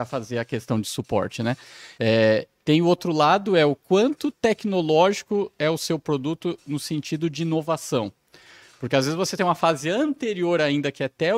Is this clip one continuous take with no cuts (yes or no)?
yes